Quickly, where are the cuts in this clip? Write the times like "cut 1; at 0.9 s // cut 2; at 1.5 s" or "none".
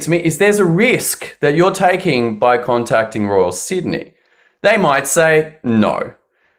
none